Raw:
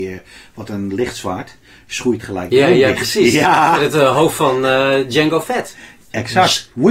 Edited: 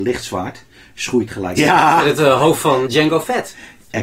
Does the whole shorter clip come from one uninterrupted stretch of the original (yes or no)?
no